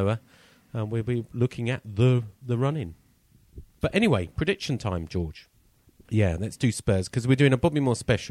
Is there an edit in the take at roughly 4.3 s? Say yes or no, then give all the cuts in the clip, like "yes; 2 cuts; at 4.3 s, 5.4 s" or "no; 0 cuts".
no; 1 cut; at 6.0 s